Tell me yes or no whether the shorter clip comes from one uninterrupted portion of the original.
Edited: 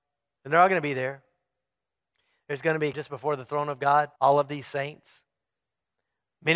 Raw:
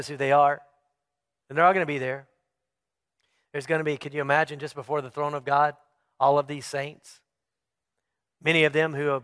no